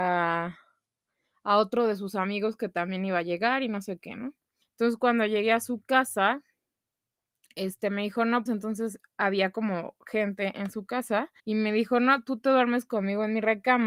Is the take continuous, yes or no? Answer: no